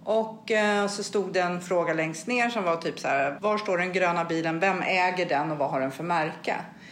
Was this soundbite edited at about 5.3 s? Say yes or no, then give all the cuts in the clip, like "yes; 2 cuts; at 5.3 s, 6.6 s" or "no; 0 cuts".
no; 1 cut; at 3.4 s